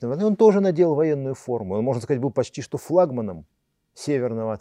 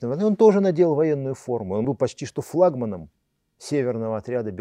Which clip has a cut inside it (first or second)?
second